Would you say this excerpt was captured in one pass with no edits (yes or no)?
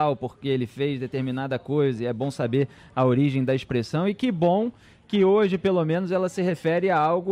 yes